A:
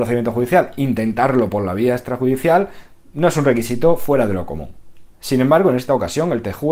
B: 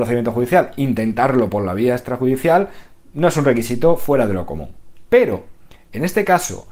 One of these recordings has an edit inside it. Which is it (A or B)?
A